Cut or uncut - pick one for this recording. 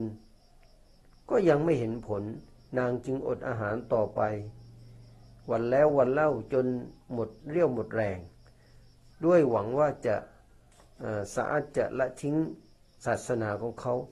uncut